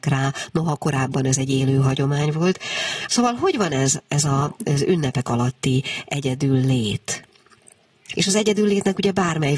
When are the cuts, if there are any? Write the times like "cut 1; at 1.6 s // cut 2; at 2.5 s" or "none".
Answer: cut 1; at 3.1 s // cut 2; at 8.1 s